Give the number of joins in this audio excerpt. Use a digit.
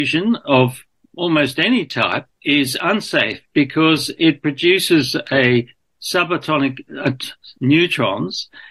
2